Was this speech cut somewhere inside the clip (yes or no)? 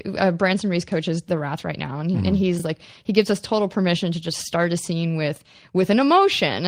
no